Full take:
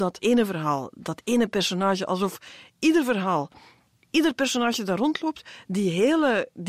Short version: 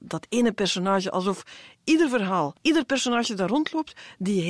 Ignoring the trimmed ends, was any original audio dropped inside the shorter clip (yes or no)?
yes